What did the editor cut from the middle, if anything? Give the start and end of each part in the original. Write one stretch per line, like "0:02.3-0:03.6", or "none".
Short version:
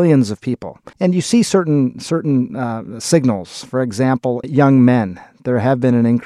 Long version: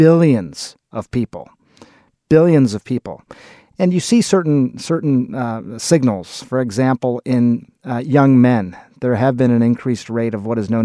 0:03.4-0:03.7
0:07.2-0:08.0

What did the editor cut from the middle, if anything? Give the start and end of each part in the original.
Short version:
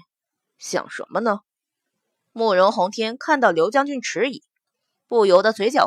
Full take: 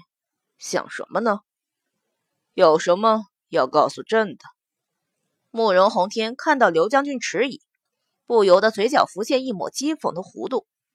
0:02.3-0:05.4

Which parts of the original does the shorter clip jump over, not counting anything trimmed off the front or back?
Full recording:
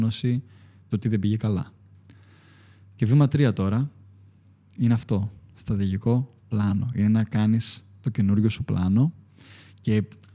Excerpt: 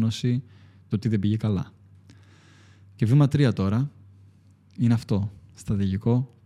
none

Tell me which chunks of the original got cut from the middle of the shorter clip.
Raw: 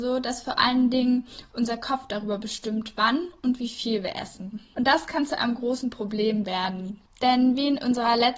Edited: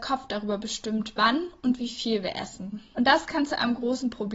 none

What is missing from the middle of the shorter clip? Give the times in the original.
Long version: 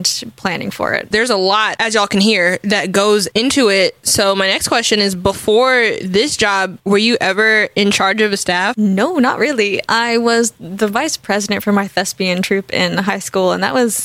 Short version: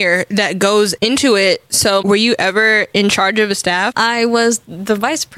0:04.3-0:06.8
0:08.8-0:09.9

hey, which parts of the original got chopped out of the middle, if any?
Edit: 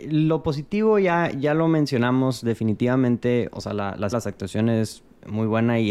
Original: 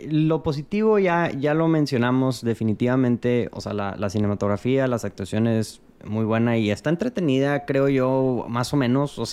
0:04.1-0:04.9

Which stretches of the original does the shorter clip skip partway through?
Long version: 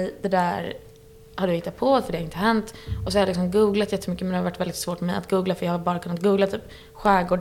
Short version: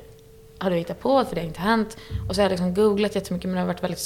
none

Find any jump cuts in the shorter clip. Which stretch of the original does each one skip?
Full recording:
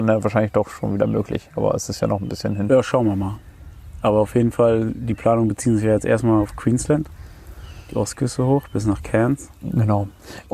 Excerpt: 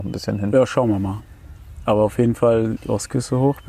0:04.9-0:07.8

